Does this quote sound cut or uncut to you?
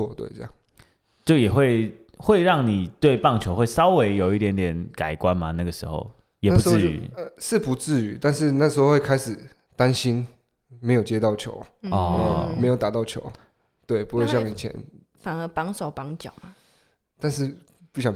uncut